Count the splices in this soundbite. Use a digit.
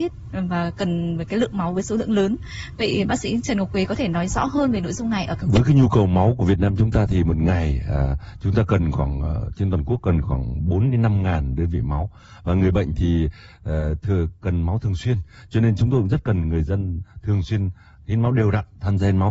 0